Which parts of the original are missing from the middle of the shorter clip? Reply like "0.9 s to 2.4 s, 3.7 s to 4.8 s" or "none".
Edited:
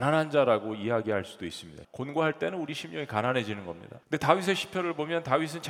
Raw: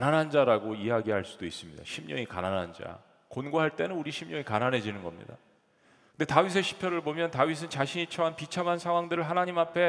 1.8 s to 3.2 s, 5.4 s to 6.1 s

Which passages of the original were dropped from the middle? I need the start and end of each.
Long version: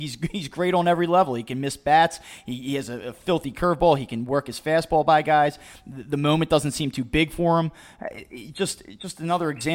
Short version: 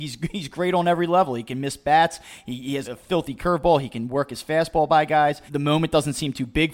2.8 s to 3.0 s, 5.6 s to 6.0 s

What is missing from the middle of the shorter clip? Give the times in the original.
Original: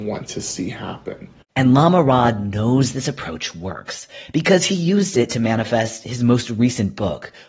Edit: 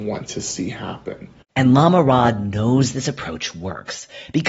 none

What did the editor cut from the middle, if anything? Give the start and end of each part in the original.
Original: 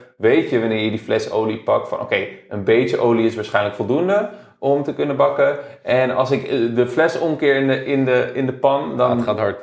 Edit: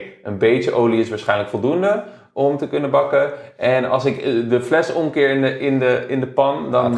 none

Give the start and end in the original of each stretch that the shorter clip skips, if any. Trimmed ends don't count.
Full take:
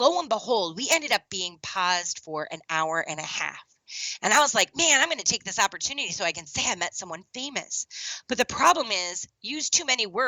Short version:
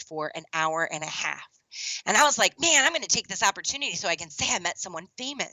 none

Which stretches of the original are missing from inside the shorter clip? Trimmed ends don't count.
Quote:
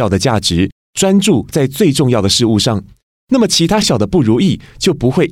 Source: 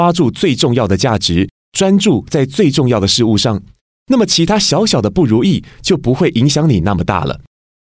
4.6 s to 4.9 s

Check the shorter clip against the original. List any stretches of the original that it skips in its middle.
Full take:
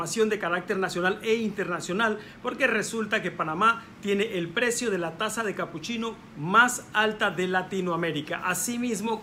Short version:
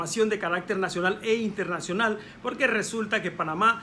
none

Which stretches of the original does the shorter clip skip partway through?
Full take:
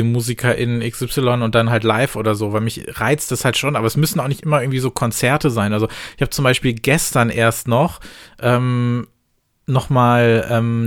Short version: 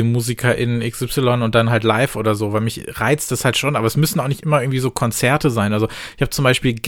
none

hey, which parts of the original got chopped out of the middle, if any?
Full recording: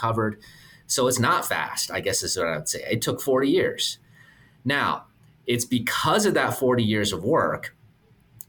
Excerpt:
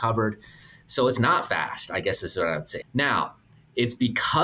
2.8 s to 4.5 s

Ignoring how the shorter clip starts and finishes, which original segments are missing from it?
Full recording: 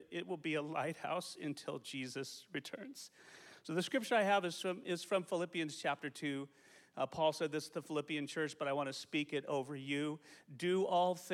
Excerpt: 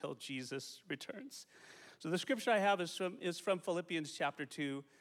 none

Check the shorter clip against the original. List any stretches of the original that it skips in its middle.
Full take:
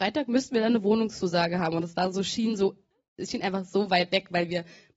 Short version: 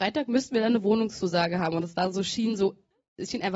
none

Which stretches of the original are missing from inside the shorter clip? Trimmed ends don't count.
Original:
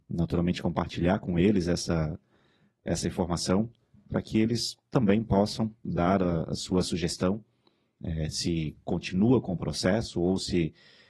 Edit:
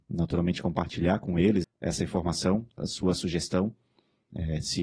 1.6 s to 2.7 s, 3.8 s to 6.5 s

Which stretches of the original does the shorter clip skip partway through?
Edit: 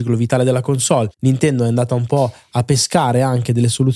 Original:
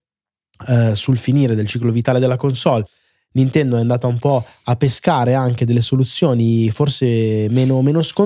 2.9 s to 3.3 s

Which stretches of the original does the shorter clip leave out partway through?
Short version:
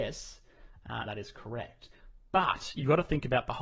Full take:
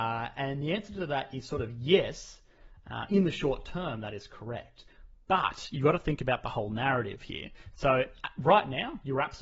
3.1 s to 4.0 s

